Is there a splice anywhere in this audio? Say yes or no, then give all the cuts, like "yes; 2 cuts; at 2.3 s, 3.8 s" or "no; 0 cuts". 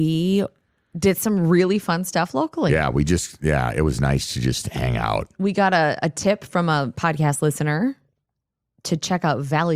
no; 0 cuts